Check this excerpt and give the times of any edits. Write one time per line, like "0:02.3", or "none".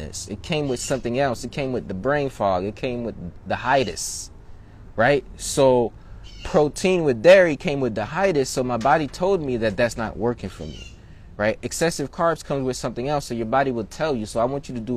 none